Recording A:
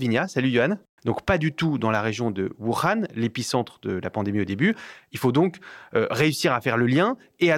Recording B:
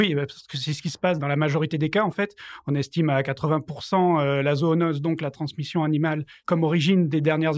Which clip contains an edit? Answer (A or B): A